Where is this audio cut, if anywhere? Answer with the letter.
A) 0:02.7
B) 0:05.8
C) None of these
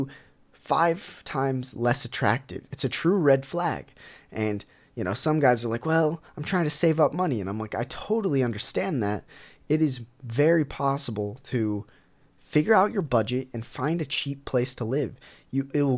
A